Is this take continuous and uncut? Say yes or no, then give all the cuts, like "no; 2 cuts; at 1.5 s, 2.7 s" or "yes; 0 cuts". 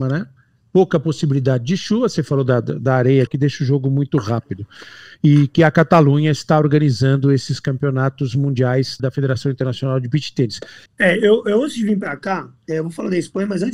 no; 3 cuts; at 3.3 s, 9.0 s, 10.9 s